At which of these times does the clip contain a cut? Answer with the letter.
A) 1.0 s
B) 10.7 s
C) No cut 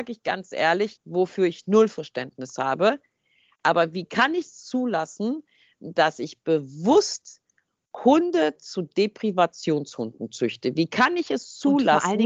A